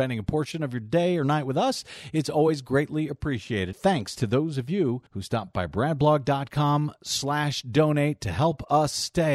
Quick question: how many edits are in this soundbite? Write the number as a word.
two